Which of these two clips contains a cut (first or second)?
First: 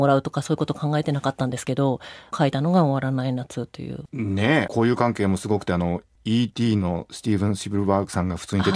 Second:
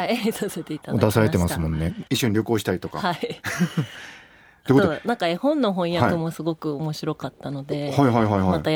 second